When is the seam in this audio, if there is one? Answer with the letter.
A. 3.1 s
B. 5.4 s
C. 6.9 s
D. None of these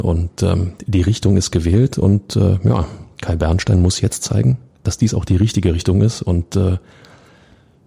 D